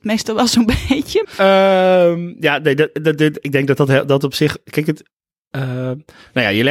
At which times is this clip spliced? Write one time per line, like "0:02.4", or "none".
0:01.2

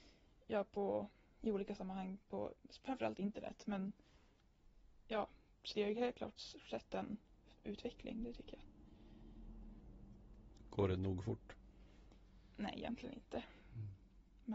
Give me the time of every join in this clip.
0:05.7

